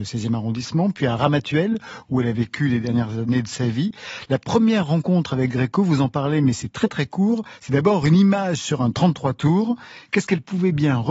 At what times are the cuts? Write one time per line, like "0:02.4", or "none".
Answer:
none